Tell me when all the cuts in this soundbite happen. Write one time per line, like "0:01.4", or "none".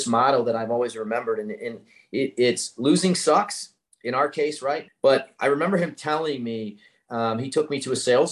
0:04.9